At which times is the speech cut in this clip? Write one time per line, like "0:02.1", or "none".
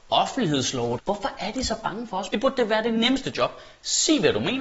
0:01.0
0:02.3